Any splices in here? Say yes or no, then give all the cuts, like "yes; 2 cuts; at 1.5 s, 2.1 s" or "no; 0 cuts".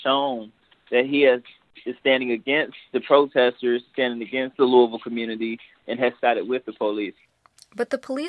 no; 0 cuts